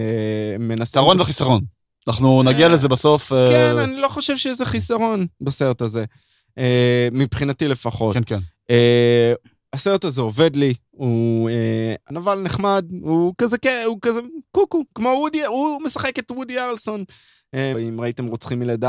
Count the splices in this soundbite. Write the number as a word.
two